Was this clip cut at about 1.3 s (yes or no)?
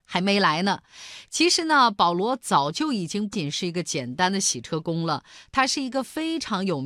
no